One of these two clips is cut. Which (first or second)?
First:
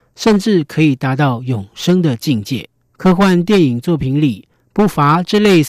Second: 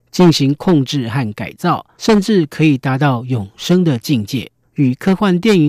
second